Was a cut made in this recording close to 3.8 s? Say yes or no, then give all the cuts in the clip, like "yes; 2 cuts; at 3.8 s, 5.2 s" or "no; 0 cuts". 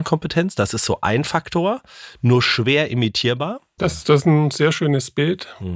yes; 1 cut; at 3.8 s